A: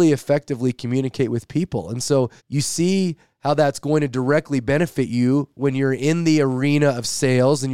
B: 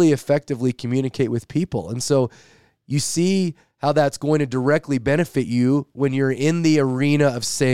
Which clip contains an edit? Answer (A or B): A